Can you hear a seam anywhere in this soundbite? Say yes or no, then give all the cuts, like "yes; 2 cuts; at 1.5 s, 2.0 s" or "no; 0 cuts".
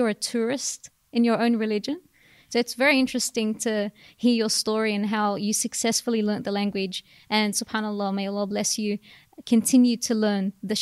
no; 0 cuts